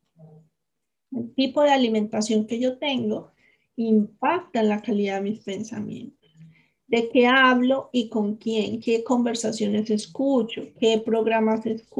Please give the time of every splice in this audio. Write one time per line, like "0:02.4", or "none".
none